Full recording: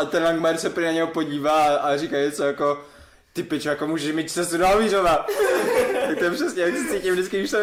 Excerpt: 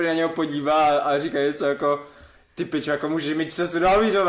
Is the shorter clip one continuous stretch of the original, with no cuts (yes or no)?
yes